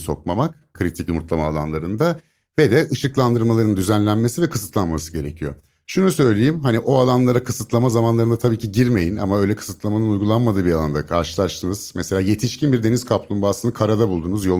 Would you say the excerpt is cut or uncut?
uncut